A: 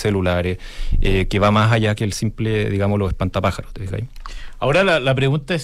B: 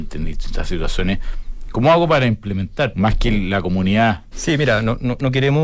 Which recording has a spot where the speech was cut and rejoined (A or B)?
B